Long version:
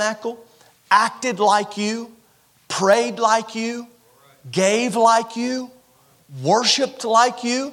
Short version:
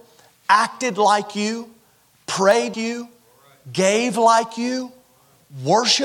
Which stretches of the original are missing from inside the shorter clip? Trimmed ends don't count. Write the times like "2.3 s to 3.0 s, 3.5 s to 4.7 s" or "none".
3.2 s to 3.5 s